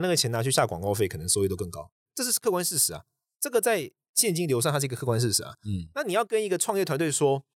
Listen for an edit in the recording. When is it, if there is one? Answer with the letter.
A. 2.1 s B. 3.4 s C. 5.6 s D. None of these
A